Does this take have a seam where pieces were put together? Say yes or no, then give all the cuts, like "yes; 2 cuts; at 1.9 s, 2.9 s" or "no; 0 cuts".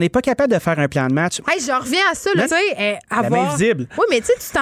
yes; 2 cuts; at 1.4 s, 2.5 s